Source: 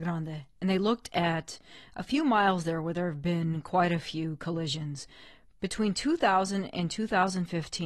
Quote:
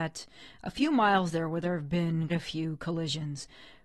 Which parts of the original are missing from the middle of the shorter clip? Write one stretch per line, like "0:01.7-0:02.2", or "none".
0:03.6-0:03.9